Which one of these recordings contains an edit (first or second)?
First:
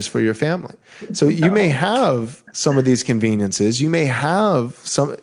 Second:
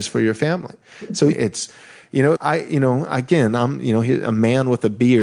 second